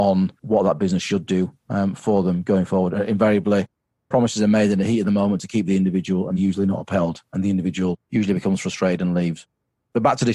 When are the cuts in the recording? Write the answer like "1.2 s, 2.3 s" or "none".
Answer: none